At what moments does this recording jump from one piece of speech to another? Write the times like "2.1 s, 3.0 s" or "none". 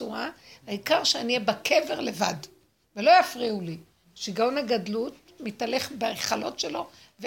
4.0 s, 5.4 s